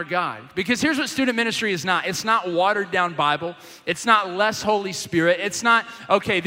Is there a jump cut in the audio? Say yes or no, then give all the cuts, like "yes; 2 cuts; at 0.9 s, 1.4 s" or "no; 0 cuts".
no; 0 cuts